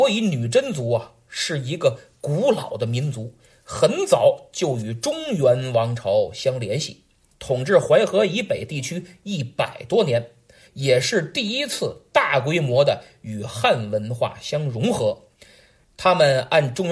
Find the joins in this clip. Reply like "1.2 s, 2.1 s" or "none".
7.3 s, 10.7 s